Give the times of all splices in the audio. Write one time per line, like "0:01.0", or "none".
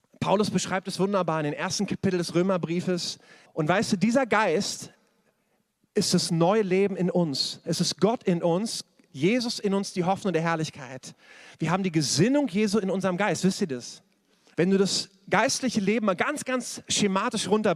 0:03.5
0:14.5